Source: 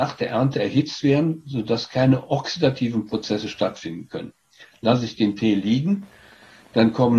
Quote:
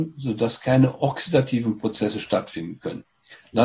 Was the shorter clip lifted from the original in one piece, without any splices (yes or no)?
yes